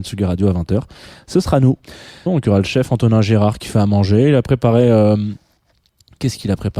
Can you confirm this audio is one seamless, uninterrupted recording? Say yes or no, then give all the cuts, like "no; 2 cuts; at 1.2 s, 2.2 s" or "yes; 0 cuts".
no; 1 cut; at 2.3 s